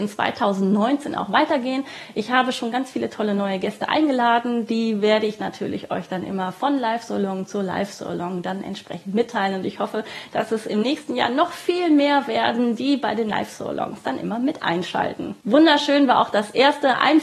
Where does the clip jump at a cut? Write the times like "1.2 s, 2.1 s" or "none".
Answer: none